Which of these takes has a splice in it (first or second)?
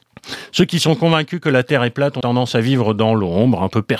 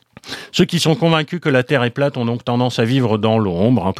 first